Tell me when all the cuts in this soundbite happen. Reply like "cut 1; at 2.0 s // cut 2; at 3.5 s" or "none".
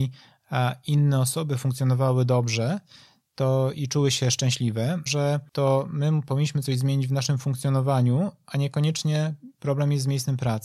cut 1; at 5.1 s